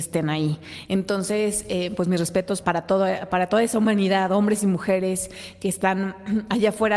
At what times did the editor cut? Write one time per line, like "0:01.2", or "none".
0:02.6

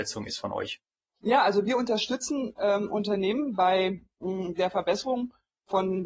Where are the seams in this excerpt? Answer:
none

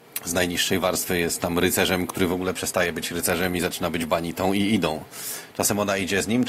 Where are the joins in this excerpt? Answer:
none

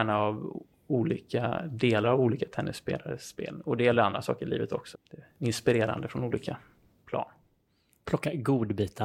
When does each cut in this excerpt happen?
0:04.9

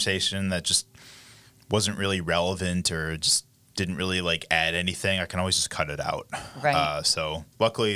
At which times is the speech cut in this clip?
none

